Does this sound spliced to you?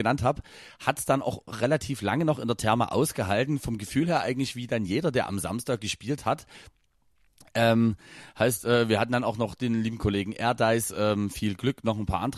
no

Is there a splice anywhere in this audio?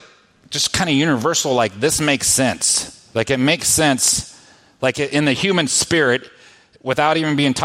no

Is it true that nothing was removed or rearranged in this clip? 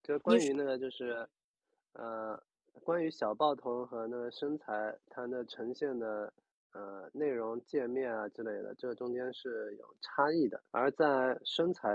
no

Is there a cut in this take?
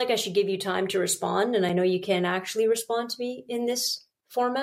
no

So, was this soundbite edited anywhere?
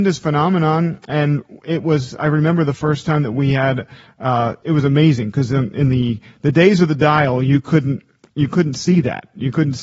yes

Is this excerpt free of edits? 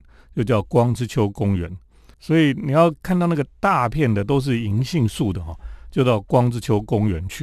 no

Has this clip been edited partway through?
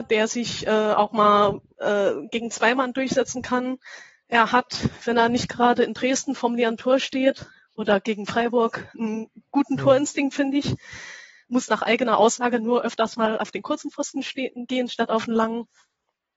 no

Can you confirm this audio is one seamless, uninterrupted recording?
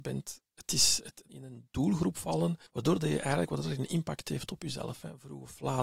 no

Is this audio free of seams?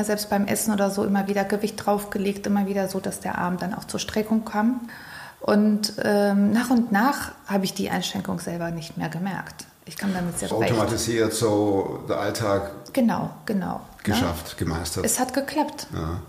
no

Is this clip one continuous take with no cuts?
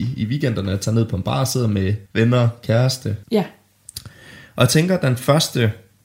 no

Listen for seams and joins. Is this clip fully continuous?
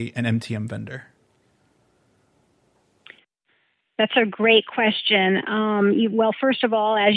yes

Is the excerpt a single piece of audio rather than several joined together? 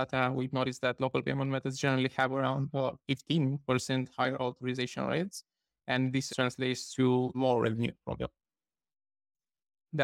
no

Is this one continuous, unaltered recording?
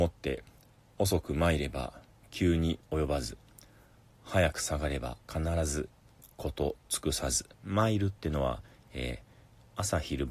no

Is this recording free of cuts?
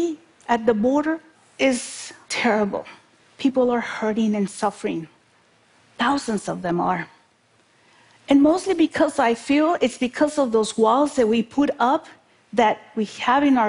yes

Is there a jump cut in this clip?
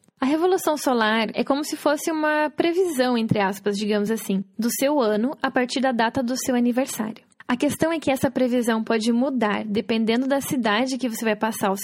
no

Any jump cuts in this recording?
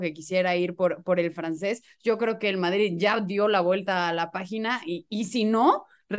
no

